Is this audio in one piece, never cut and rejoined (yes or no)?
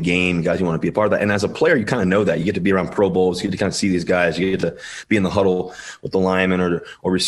yes